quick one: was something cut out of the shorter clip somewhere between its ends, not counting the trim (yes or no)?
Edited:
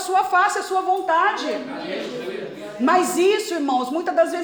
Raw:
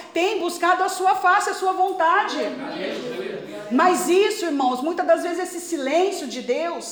no